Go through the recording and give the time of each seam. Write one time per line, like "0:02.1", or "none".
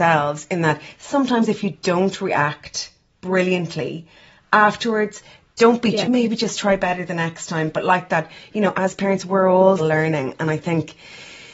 0:06.0
0:09.8